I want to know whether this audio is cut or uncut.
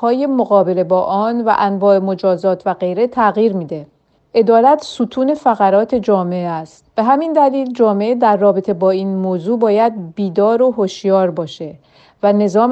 uncut